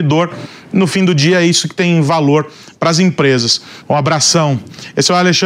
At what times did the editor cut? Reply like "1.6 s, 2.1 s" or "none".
3.8 s